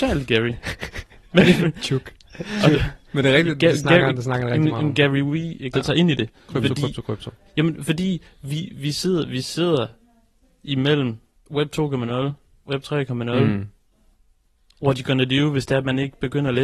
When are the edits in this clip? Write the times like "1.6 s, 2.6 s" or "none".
5.7 s